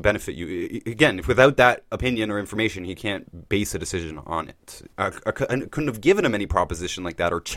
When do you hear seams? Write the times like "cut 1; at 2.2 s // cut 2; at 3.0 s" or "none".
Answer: cut 1; at 4.9 s